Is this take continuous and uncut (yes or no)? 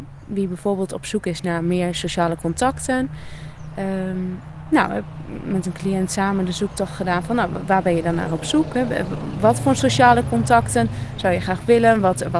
yes